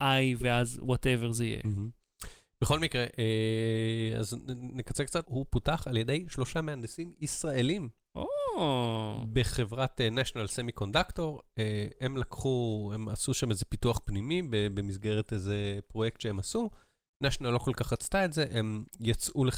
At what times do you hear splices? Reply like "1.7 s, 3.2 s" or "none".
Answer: 5.2 s